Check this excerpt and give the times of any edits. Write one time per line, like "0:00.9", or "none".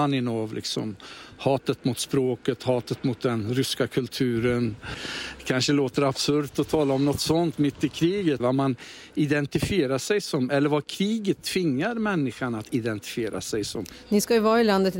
0:08.4